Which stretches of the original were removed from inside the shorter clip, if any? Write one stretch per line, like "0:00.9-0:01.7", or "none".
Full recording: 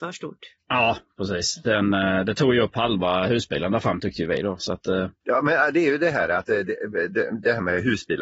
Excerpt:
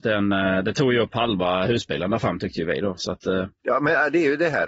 none